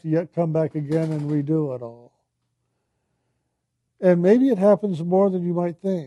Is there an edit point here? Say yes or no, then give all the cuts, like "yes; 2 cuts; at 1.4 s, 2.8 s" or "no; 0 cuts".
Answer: yes; 1 cut; at 3.9 s